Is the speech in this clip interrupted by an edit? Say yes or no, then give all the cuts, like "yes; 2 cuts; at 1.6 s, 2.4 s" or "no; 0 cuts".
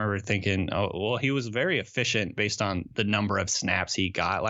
no; 0 cuts